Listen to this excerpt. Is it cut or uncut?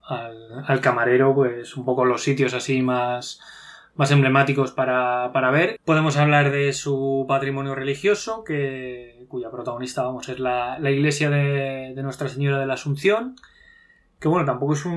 cut